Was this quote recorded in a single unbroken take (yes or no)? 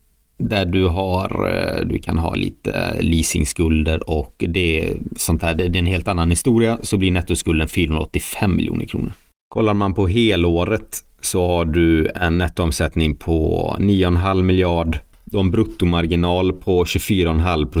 yes